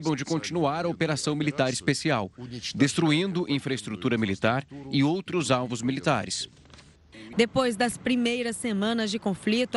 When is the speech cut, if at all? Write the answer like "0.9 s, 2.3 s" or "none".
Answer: 7.3 s